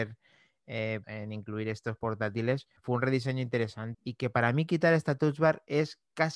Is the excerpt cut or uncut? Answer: cut